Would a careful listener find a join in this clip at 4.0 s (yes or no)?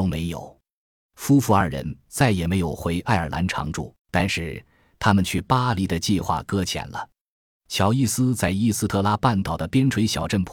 yes